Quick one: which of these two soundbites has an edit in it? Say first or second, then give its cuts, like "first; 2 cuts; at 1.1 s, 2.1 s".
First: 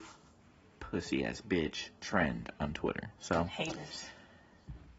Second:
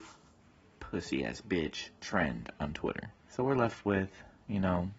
second; 1 cut; at 3.1 s